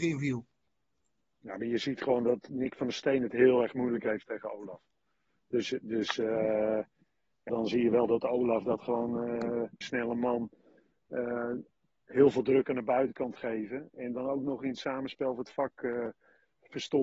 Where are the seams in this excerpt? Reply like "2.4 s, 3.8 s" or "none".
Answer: 7.5 s, 9.8 s